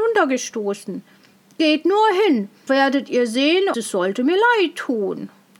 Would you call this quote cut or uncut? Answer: cut